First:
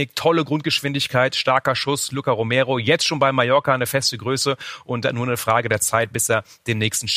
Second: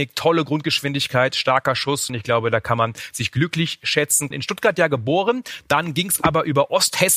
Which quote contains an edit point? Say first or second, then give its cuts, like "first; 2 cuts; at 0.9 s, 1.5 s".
second; 2 cuts; at 2.1 s, 4.3 s